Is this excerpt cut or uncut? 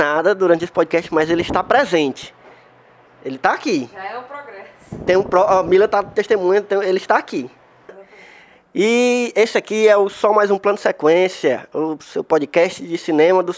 cut